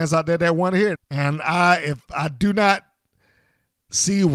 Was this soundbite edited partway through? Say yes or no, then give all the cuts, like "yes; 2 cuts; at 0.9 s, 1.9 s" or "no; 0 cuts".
yes; 1 cut; at 1.0 s